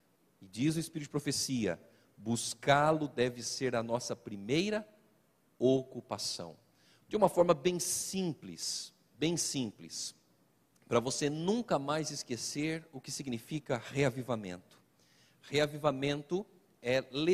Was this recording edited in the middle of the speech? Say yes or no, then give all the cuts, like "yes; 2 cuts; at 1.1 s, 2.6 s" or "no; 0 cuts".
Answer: yes; 1 cut; at 7.0 s